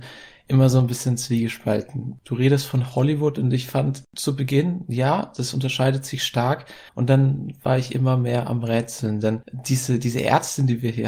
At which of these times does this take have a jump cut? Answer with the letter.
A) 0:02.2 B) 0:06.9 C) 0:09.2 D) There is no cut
B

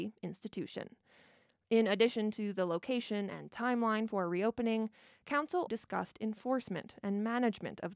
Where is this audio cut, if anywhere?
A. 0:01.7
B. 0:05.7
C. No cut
B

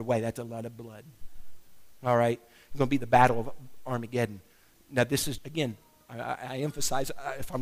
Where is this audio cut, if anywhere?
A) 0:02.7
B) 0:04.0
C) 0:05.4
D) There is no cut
C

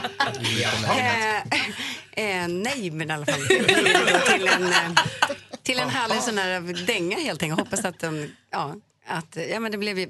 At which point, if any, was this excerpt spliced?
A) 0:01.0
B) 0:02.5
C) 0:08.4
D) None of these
D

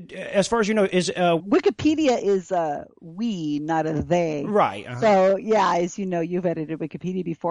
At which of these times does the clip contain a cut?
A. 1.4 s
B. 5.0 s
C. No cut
A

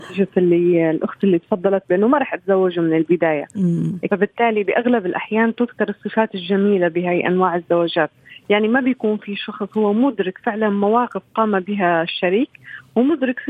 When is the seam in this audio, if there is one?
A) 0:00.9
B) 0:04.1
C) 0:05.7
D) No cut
B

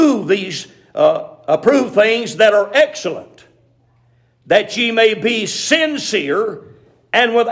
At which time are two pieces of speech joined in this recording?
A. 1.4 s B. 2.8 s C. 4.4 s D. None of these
D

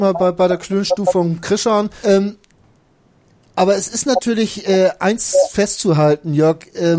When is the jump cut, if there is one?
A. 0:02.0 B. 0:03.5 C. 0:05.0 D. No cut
A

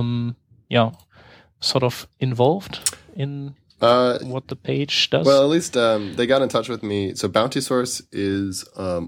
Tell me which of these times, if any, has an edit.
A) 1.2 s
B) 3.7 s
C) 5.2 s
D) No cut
D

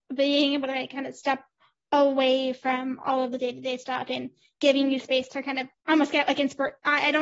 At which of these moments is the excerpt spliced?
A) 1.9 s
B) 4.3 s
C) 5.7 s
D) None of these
C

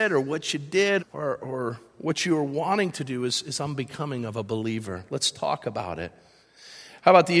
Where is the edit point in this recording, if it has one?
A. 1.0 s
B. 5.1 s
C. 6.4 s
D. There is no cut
A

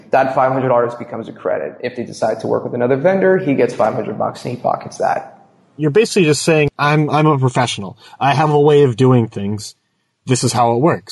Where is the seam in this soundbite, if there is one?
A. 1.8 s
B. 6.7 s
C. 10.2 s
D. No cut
B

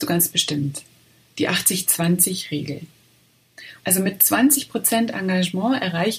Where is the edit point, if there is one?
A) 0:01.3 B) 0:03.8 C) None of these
B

